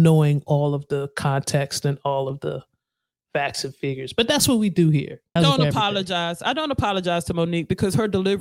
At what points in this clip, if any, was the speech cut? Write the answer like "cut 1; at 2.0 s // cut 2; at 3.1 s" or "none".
cut 1; at 5.4 s